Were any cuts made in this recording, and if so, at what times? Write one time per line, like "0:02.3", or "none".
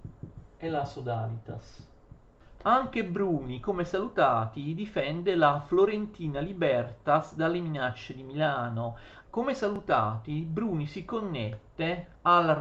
0:02.6
0:09.2